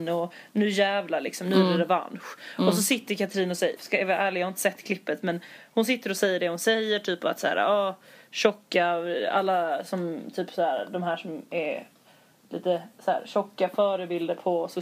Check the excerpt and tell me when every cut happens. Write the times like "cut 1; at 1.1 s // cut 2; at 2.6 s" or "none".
cut 1; at 3.8 s